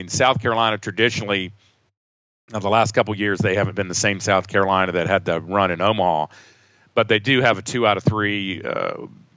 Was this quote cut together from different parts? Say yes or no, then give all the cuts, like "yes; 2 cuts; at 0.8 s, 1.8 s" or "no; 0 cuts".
no; 0 cuts